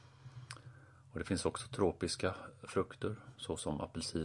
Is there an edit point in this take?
no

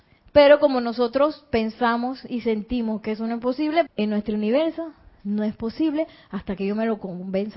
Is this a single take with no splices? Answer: no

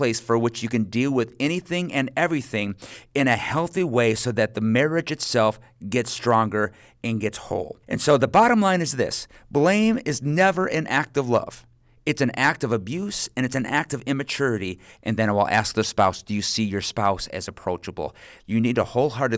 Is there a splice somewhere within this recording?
yes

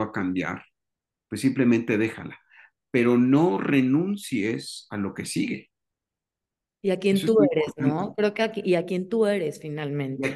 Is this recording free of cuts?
yes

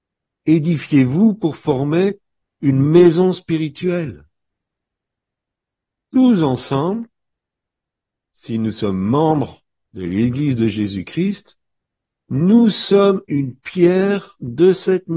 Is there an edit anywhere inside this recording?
no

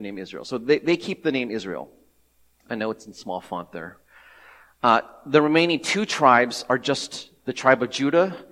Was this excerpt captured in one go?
no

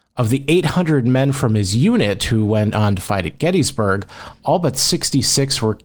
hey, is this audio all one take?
yes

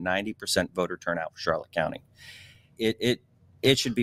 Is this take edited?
yes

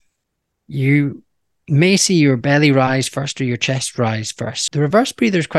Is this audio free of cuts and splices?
no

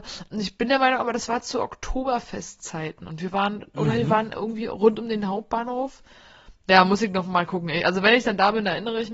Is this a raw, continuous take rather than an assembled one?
yes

